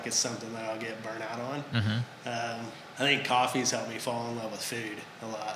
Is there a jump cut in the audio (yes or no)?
yes